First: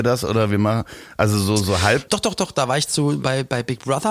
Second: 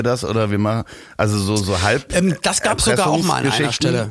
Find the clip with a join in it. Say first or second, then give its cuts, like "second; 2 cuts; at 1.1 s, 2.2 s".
first; 1 cut; at 2.1 s